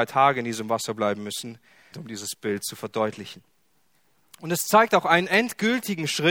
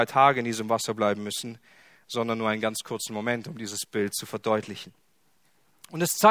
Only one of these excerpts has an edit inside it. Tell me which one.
first; 1 cut; at 1.9 s

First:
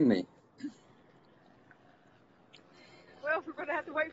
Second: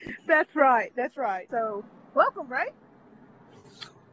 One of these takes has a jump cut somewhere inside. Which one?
second; 1 cut; at 1.5 s

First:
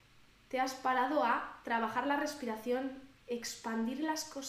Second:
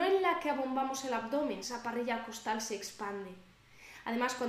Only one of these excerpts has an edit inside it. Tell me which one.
second; 1 cut; at 1.6 s

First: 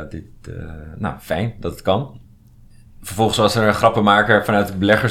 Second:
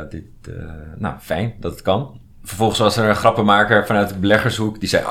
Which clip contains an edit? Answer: second; 1 cut; at 2.3 s

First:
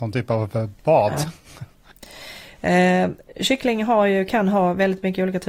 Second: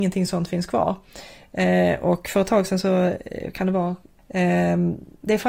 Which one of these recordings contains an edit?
second; 1 cut; at 4.2 s

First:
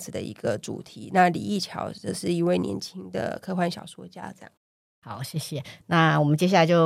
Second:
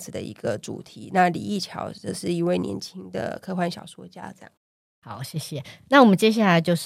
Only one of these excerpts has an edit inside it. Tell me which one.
first; 1 cut; at 5.8 s

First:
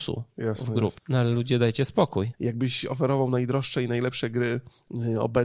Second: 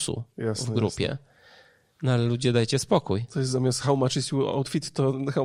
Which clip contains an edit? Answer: first; 2 cuts; at 1.0 s, 2.3 s

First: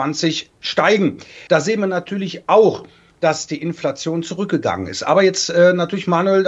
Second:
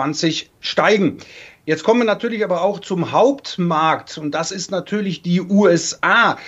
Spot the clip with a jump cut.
first; 1 cut; at 1.5 s

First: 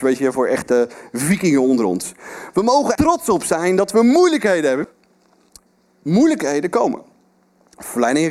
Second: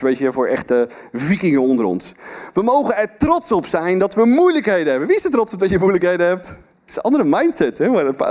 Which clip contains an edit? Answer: first; 2 cuts; at 3.0 s, 4.8 s

